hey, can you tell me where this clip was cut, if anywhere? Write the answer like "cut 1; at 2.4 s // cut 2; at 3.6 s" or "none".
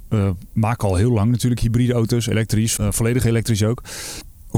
cut 1; at 2.8 s